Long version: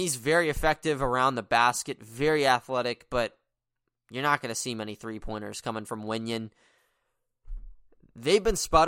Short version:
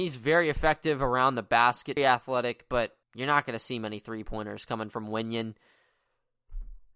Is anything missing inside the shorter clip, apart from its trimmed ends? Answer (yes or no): yes